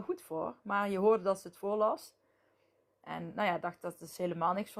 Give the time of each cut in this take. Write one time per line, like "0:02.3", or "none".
none